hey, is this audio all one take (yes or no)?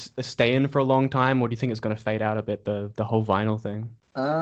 yes